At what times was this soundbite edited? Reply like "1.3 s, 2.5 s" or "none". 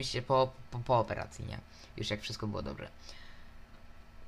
none